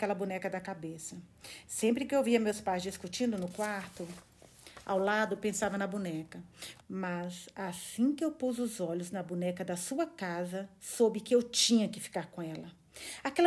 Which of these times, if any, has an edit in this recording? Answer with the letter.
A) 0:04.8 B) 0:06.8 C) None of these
B